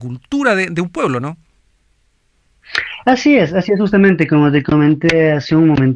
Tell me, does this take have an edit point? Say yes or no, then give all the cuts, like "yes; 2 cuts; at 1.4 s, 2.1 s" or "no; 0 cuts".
no; 0 cuts